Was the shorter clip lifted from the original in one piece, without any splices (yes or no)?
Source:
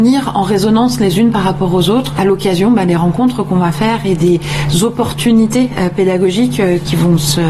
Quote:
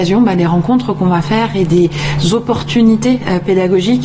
yes